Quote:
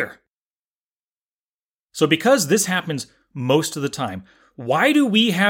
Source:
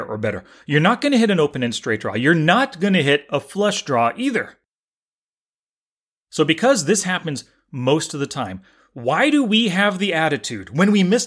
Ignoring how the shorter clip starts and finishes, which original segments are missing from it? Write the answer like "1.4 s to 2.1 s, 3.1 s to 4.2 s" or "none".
none